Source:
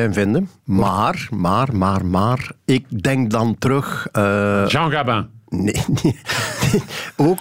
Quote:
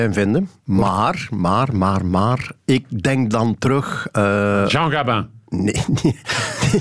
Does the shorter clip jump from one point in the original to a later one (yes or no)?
no